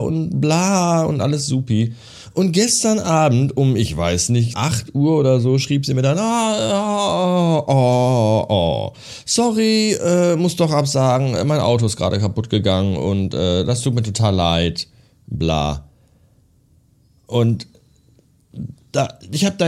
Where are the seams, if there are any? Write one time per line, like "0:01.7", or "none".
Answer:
0:04.5

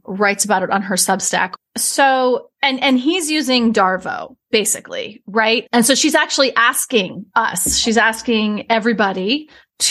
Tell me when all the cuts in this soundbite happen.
0:01.6
0:05.7

